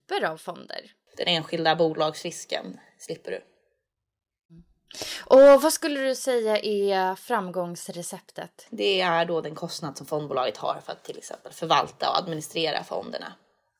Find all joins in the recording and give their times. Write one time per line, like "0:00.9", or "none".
0:01.1
0:08.7